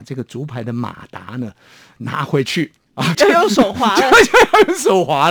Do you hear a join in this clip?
yes; 2 cuts; at 2.0 s, 3.1 s

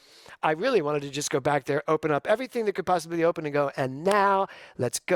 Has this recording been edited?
no; 0 cuts

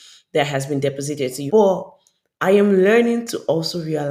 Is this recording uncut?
no; 1 cut; at 1.5 s

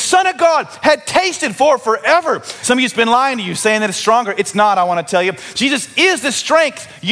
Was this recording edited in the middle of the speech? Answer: yes; 1 cut; at 2.6 s

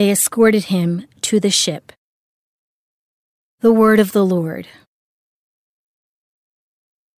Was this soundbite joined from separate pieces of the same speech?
no; 0 cuts

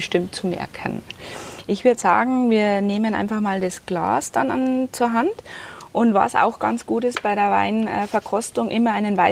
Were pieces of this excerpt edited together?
no; 0 cuts

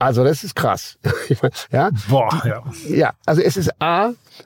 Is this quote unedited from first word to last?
yes; 0 cuts

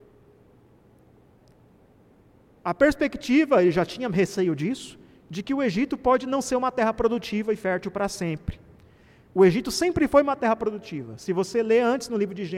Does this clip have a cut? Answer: no; 0 cuts

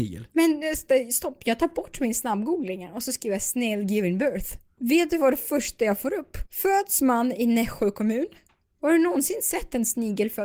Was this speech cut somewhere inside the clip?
yes; 3 cuts; at 4.8 s, 6.5 s, 8.8 s

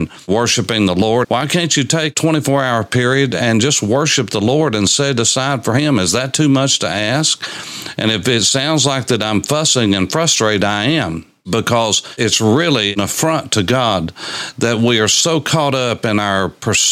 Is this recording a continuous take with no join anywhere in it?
no; 1 cut; at 1.2 s

